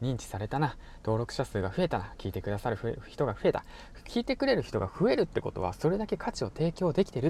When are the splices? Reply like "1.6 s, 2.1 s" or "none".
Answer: none